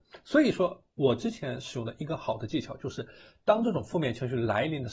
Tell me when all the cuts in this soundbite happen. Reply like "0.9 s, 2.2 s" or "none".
none